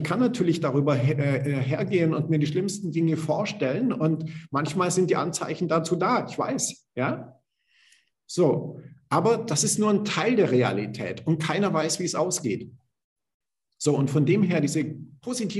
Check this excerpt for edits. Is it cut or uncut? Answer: uncut